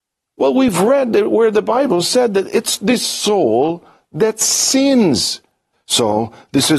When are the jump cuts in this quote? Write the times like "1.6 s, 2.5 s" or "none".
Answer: 5.7 s